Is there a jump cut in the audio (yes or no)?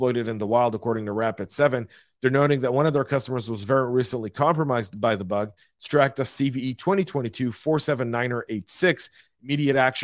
no